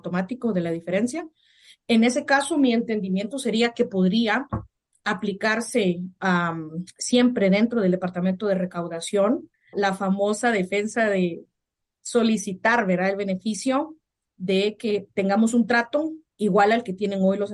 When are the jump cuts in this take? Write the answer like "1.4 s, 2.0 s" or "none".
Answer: 9.7 s